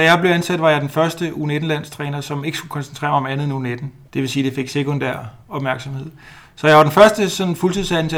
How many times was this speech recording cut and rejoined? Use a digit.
1